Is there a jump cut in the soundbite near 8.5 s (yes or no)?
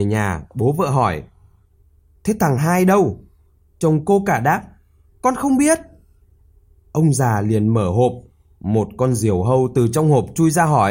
no